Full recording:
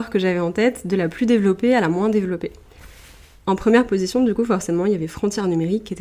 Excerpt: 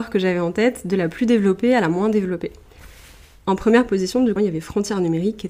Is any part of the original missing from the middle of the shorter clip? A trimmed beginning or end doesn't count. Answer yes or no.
yes